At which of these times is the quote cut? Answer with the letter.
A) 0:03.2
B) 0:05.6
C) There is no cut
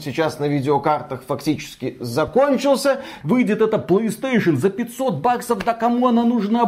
A